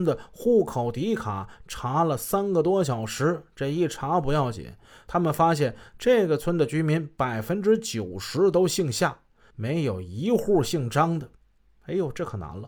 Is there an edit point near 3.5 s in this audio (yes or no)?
no